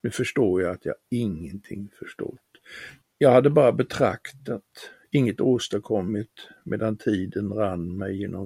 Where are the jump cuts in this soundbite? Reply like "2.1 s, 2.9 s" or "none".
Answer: 3.0 s

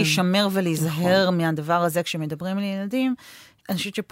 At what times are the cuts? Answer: none

